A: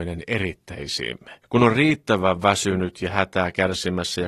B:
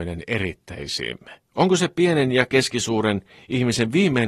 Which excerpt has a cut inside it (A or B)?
A